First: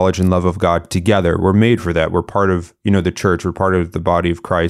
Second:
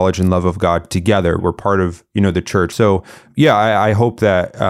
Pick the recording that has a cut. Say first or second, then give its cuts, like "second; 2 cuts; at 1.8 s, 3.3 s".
second; 2 cuts; at 1.4 s, 2.7 s